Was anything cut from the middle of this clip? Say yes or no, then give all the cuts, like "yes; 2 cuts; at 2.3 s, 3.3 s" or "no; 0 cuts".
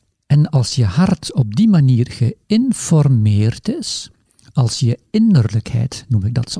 no; 0 cuts